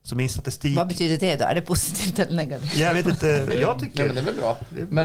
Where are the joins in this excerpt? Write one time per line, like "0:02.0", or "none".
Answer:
none